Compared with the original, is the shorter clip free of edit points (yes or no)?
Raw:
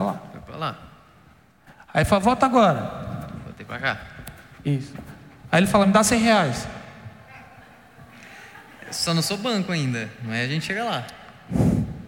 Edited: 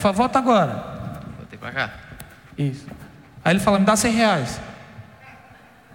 yes